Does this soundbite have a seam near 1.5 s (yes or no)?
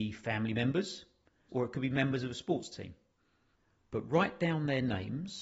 yes